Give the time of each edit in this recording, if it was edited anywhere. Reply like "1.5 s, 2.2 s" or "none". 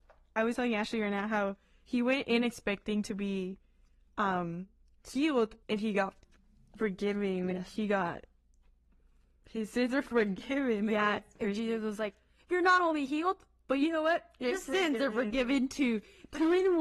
5.6 s